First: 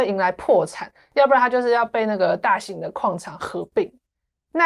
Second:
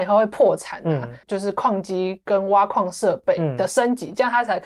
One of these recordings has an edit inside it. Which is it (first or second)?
second